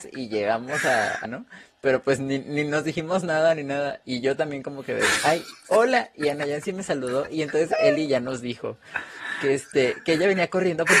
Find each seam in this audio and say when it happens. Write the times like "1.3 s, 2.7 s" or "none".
1.2 s, 4.0 s

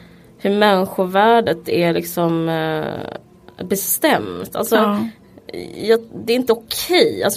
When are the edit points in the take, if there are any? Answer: none

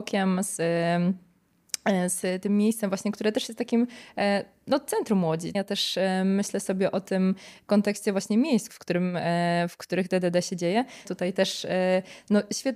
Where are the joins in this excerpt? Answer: 5.5 s, 8.7 s, 11.1 s

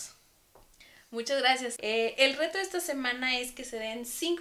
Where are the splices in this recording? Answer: 1.8 s

